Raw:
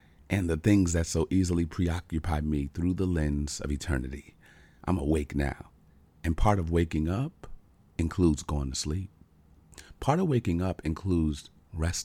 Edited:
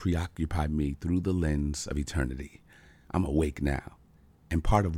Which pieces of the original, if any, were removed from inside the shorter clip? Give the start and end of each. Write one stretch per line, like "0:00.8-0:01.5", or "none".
none